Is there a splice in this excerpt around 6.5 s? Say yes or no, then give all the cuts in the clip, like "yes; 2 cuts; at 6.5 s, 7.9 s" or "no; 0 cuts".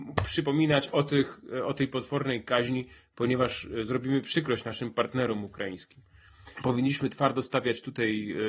yes; 1 cut; at 6.5 s